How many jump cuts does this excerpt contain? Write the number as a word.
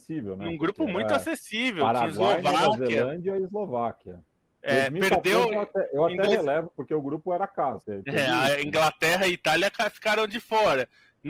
two